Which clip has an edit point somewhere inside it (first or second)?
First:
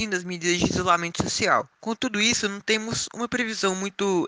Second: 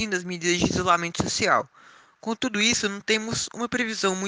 first